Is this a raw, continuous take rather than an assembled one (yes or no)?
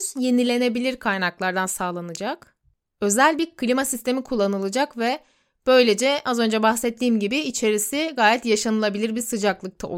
yes